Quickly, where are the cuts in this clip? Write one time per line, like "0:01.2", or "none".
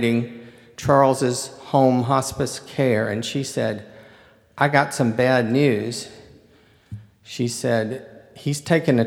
none